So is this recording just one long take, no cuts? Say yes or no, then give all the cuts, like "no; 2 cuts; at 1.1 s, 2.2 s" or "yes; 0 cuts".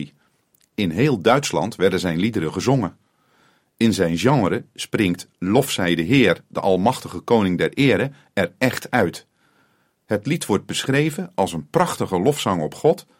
yes; 0 cuts